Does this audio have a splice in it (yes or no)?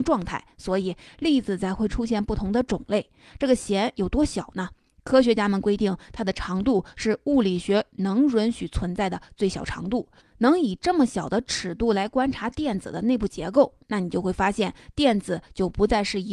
yes